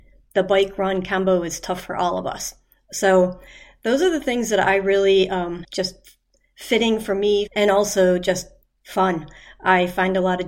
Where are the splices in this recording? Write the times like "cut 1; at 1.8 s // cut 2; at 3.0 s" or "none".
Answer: cut 1; at 5.6 s // cut 2; at 7.5 s